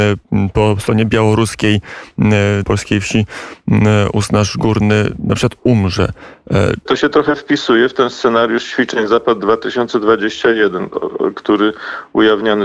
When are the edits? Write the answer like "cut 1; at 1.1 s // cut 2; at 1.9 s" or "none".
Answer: cut 1; at 2.6 s // cut 2; at 6.9 s